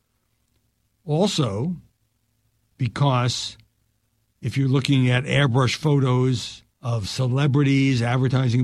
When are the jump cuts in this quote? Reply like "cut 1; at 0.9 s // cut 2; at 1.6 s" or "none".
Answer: cut 1; at 2.7 s // cut 2; at 6.7 s